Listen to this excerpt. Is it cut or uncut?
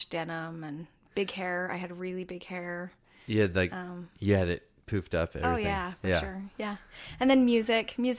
uncut